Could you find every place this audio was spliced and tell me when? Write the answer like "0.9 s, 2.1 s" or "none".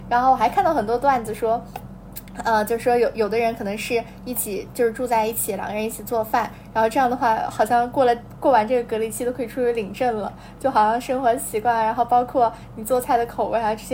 8.4 s